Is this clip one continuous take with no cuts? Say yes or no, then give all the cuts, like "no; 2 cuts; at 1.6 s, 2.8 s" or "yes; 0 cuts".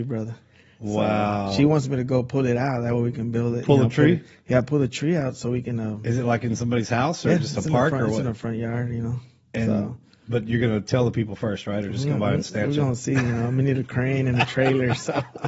yes; 0 cuts